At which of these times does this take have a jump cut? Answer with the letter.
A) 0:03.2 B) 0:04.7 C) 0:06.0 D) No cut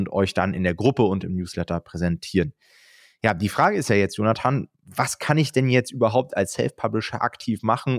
B